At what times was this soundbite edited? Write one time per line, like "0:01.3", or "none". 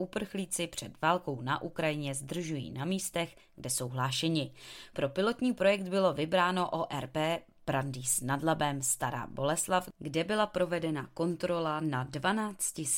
none